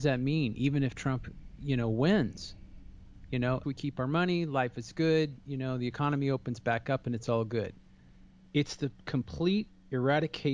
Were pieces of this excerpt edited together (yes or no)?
yes